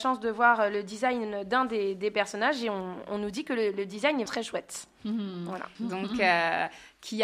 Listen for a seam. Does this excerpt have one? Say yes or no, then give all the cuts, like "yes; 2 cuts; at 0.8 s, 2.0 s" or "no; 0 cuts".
yes; 2 cuts; at 4.3 s, 5.8 s